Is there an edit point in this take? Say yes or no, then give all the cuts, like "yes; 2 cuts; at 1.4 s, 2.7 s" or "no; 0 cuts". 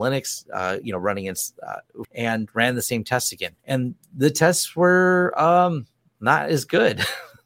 yes; 2 cuts; at 2.0 s, 3.6 s